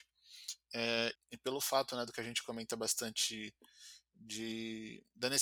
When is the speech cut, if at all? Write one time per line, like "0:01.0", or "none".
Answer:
0:01.1